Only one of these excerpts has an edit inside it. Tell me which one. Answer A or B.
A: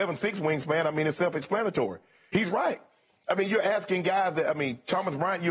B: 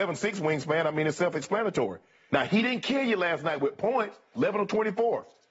B